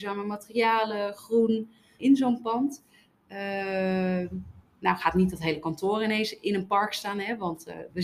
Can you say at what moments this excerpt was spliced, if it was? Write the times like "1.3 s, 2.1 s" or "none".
2.0 s